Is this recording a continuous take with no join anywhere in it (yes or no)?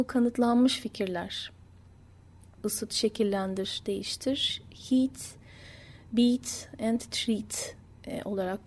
no